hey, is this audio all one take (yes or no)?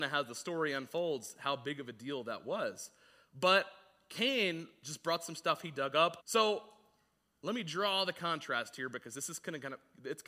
no